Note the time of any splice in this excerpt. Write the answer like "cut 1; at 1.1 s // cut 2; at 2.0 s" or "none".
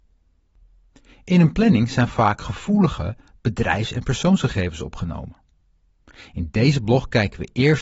none